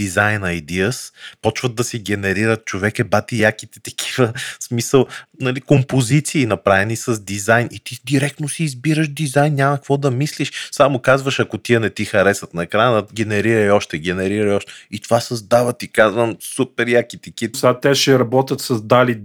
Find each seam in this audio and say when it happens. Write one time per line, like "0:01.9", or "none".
0:17.5